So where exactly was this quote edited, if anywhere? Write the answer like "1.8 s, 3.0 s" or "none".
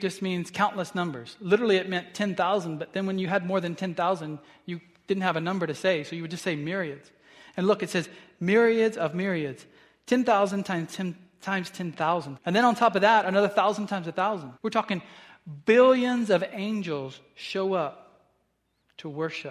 12.4 s, 14.6 s